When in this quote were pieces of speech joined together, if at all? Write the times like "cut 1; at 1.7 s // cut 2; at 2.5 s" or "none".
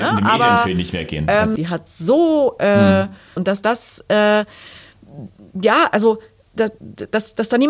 cut 1; at 1.6 s // cut 2; at 3.4 s // cut 3; at 6.8 s